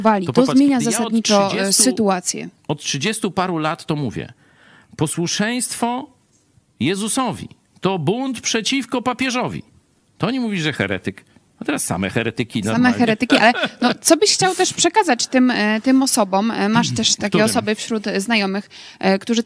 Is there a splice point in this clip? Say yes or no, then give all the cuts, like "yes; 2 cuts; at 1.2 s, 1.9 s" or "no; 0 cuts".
no; 0 cuts